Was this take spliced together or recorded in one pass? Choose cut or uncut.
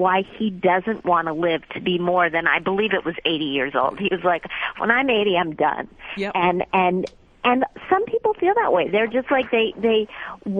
uncut